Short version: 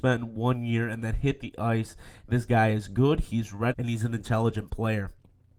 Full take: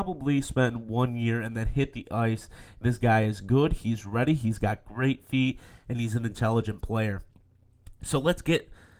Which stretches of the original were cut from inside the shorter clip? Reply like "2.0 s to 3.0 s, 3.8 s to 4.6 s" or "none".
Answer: 4.3 s to 5.8 s